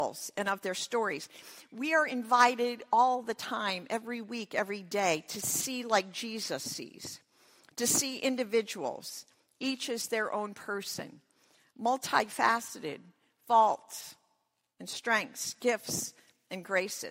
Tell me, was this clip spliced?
no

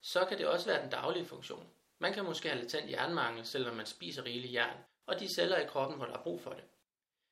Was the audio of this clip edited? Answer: yes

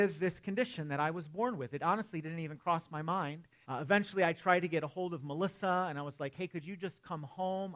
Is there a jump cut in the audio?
yes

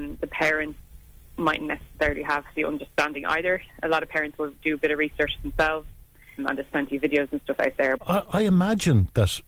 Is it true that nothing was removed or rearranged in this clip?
no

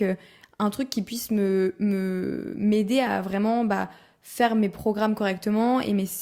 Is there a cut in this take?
no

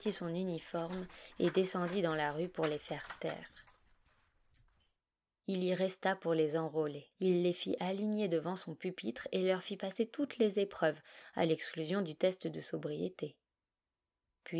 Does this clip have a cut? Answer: yes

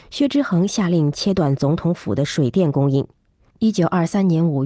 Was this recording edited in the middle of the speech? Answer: yes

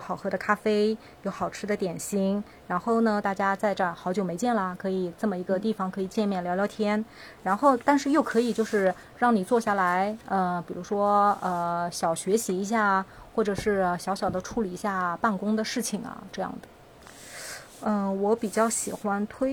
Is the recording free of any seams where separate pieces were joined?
no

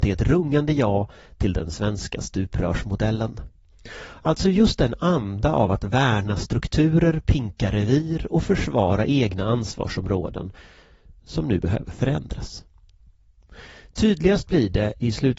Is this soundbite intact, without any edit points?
yes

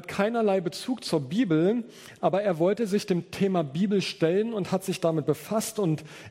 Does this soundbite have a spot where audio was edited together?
no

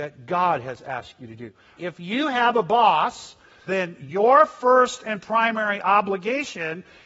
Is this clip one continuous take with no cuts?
no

